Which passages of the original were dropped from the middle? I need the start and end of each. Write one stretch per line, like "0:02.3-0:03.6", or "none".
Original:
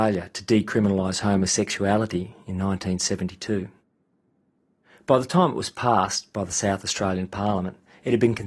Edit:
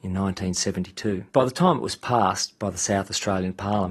0:03.7-0:05.0